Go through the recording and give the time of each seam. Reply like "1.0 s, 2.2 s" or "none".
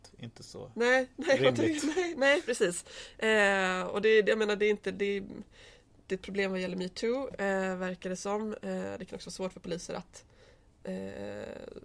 none